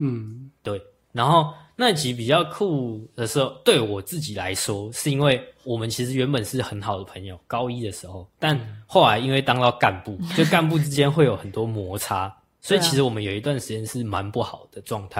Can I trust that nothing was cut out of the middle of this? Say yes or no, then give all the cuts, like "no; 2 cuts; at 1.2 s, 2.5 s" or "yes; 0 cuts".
no; 1 cut; at 8.3 s